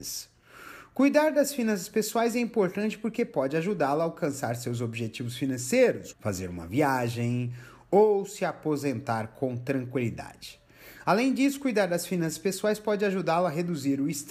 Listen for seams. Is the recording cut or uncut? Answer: cut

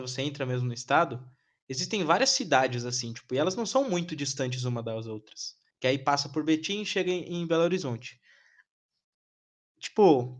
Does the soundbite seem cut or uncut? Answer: cut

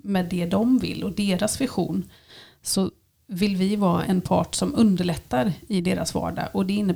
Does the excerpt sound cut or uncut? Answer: cut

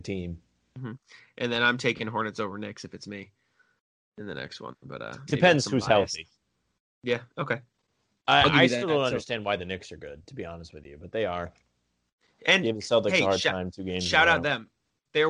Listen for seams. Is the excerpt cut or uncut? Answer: uncut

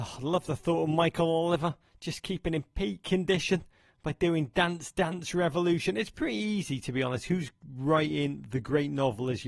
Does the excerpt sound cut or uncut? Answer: uncut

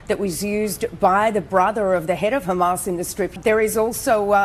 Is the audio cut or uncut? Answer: cut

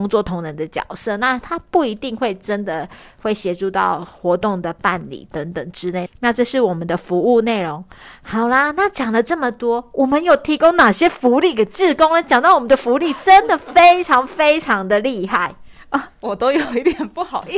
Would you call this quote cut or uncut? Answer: cut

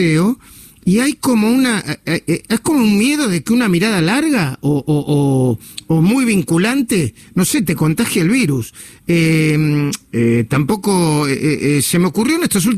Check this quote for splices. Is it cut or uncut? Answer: uncut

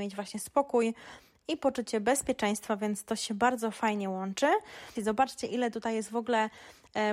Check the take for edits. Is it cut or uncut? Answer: cut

